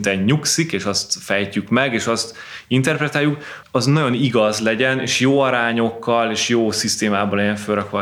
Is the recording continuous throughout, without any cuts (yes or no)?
no